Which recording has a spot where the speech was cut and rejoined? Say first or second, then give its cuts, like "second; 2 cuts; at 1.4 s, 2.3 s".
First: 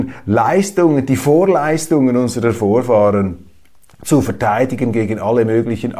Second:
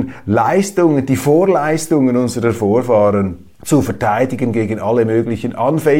second; 1 cut; at 3.5 s